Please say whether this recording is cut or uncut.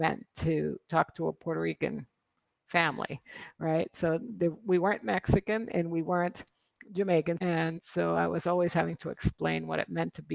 cut